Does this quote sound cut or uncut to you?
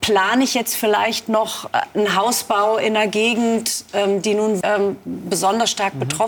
cut